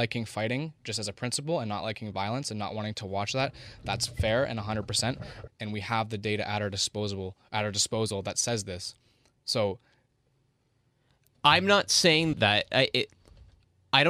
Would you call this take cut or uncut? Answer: cut